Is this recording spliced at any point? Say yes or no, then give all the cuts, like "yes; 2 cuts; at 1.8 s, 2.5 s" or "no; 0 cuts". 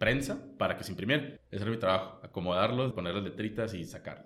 yes; 2 cuts; at 1.4 s, 2.9 s